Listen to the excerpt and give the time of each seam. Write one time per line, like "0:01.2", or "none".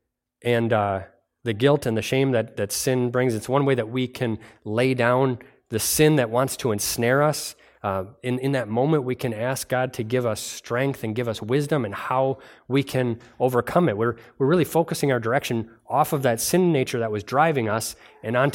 none